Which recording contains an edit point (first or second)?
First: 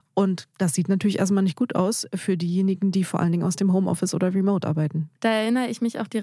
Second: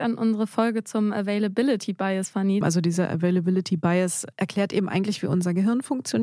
second